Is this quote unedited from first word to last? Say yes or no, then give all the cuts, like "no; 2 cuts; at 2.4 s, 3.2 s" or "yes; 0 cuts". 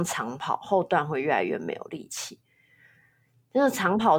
yes; 0 cuts